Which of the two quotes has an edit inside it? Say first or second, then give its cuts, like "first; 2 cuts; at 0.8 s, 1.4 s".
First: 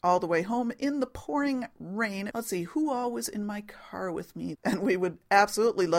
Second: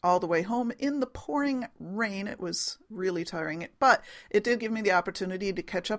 first; 2 cuts; at 2.3 s, 4.5 s